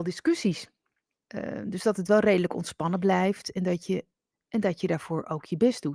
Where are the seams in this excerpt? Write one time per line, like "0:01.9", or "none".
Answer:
0:01.2
0:04.3